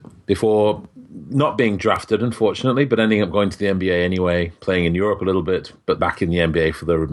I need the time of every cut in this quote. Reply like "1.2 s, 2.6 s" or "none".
6.0 s